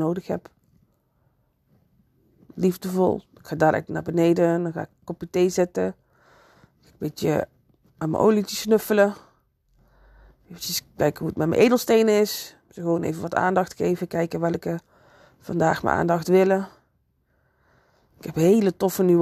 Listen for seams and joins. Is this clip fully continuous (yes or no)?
yes